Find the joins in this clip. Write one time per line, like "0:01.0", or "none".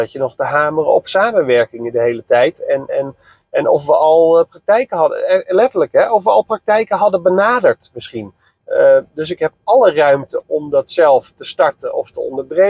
0:08.6
0:10.4